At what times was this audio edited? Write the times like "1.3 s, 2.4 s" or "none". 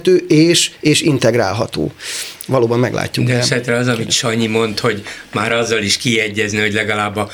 none